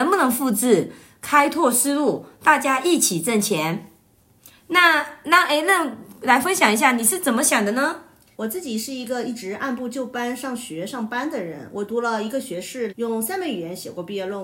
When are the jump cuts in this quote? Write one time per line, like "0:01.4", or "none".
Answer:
0:08.3
0:12.9

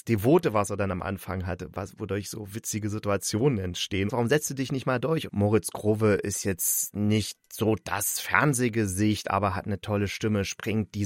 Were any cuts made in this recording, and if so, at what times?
0:04.1
0:05.3

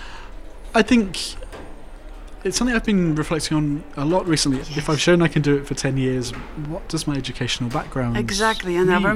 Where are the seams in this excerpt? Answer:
0:02.4
0:04.6

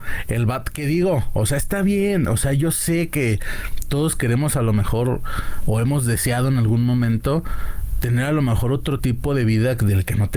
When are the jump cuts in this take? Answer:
none

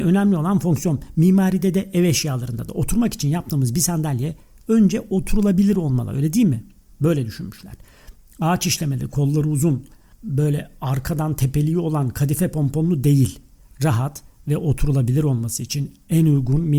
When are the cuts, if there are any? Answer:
none

